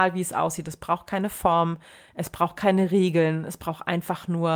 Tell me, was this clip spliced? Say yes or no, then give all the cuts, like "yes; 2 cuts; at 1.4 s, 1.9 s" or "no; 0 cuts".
no; 0 cuts